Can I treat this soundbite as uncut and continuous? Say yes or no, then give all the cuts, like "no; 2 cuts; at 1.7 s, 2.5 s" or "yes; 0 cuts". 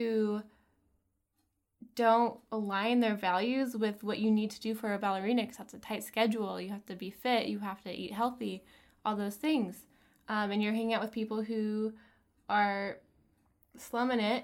yes; 0 cuts